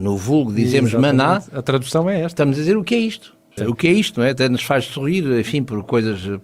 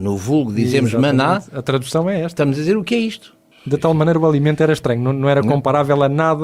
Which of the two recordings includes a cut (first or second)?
first